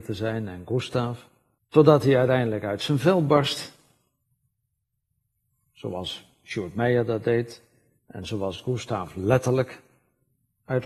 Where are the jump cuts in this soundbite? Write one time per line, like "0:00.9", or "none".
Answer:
0:01.6